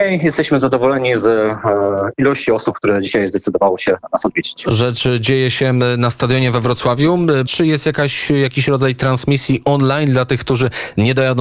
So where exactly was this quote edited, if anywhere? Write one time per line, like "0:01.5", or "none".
0:07.5